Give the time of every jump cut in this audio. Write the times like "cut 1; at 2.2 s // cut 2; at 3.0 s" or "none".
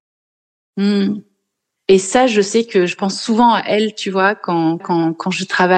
cut 1; at 1.8 s // cut 2; at 4.8 s